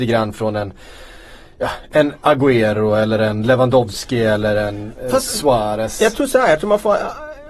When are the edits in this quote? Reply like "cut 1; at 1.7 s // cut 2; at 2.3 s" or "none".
none

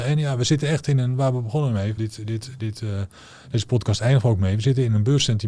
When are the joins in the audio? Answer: cut 1; at 2.0 s

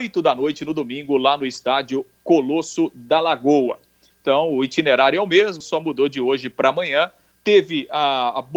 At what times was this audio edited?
cut 1; at 4.1 s // cut 2; at 5.6 s // cut 3; at 7.3 s

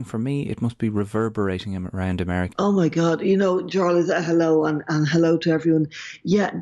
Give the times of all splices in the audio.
cut 1; at 2.5 s

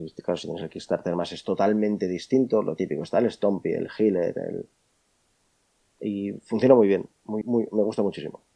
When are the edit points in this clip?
cut 1; at 7.4 s

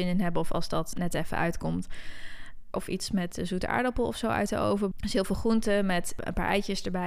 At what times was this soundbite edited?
cut 1; at 0.9 s // cut 2; at 2.7 s // cut 3; at 4.9 s

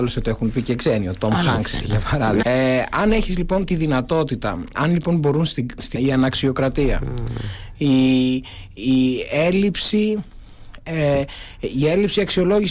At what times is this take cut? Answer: cut 1; at 2.4 s // cut 2; at 4.7 s // cut 3; at 6.0 s

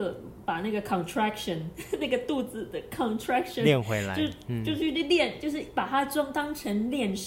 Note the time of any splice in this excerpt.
none

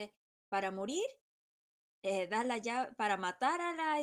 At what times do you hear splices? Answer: none

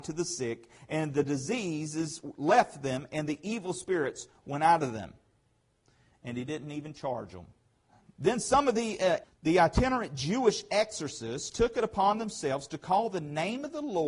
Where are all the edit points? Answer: cut 1; at 8.2 s // cut 2; at 9.2 s

